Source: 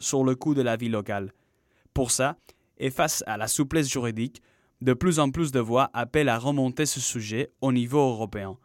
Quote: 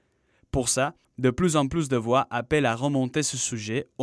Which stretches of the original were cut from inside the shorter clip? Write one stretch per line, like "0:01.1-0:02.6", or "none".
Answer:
0:02.5-0:04.7